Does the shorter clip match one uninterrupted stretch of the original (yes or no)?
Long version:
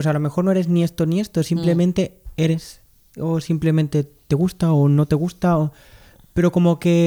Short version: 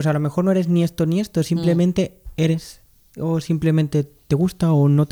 yes